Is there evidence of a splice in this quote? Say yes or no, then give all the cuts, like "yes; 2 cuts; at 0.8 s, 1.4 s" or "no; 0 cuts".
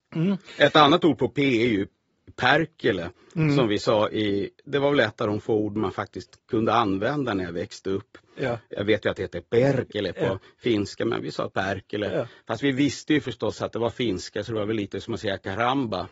no; 0 cuts